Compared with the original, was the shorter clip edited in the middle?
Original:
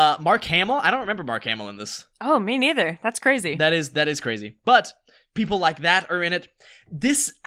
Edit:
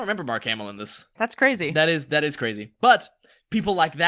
yes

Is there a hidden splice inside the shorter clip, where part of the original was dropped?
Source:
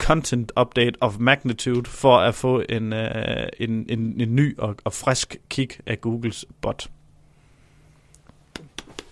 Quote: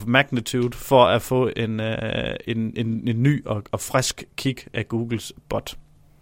no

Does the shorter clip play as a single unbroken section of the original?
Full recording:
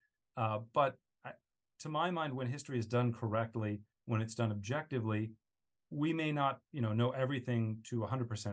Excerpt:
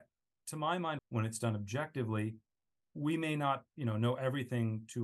no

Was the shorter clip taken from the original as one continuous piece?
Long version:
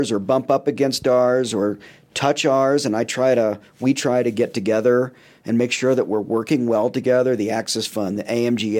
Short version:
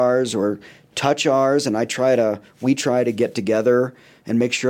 yes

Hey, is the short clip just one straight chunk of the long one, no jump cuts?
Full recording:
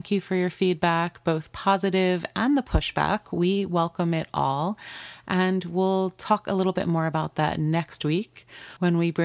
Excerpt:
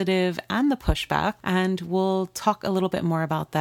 no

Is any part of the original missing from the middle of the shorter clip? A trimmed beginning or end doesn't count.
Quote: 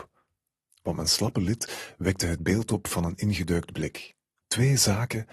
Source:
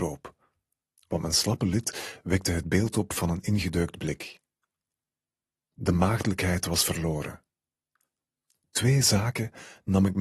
yes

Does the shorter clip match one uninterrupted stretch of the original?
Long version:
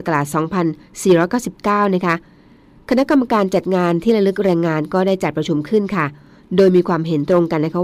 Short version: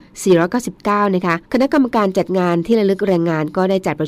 no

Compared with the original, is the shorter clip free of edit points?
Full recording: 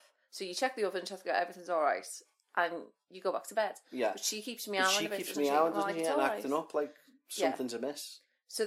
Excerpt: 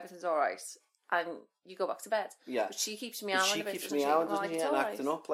yes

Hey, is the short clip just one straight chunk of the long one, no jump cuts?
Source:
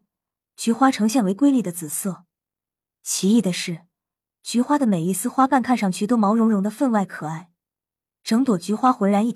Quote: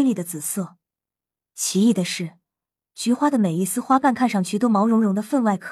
yes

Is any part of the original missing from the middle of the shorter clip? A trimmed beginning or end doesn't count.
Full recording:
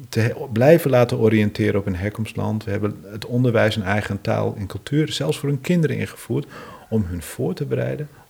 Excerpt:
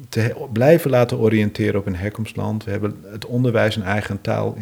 no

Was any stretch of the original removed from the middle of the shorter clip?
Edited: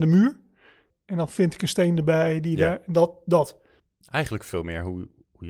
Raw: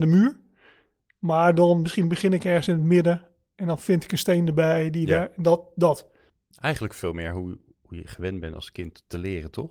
yes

